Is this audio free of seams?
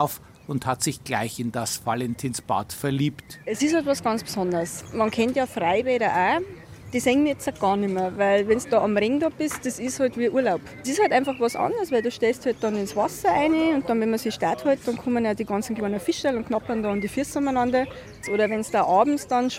no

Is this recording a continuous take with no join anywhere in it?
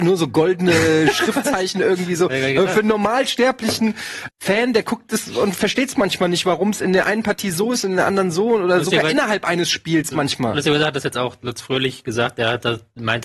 no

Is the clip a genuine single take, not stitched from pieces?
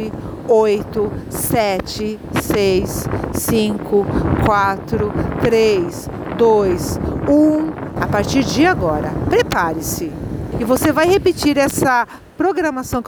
no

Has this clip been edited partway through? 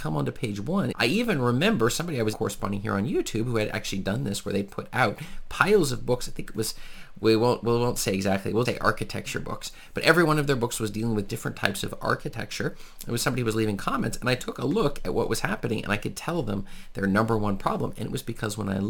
yes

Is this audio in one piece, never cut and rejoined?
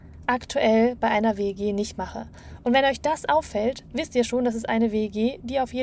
yes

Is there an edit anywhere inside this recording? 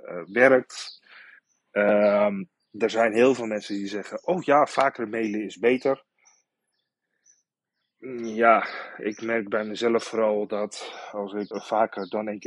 yes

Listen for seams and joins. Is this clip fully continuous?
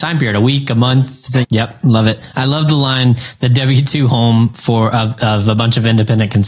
no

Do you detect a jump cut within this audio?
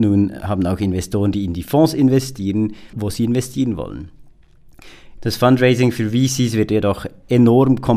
yes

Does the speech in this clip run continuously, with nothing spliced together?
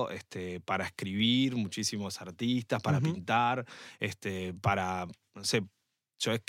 yes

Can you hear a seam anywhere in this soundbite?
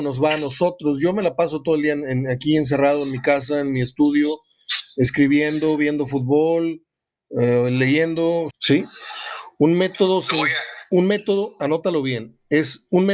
yes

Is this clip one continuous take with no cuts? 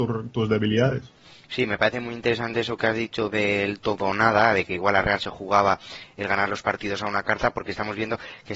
yes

